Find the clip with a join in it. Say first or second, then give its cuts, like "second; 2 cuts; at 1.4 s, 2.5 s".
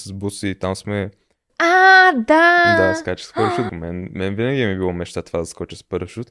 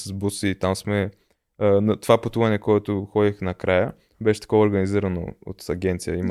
first; 2 cuts; at 1.5 s, 3.7 s